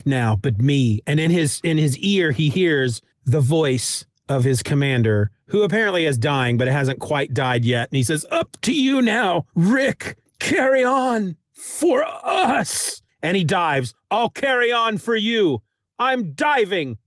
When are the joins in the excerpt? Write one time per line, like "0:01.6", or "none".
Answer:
0:09.5